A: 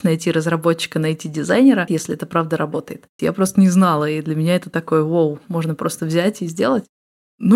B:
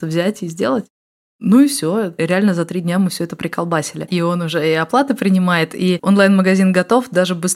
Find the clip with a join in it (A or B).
A